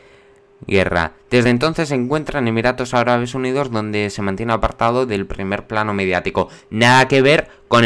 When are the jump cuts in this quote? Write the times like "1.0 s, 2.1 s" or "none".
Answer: none